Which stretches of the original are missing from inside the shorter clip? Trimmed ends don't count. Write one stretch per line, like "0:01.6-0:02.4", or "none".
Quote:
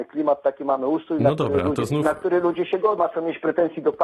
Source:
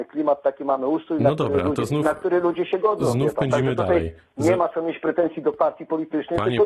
0:03.0-0:04.6